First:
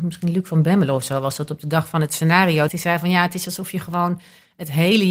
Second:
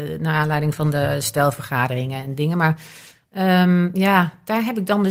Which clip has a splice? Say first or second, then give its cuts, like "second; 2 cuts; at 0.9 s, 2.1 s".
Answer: first; 1 cut; at 2.7 s